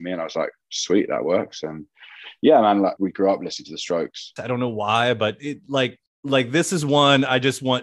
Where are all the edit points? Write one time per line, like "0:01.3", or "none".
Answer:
0:03.0
0:04.4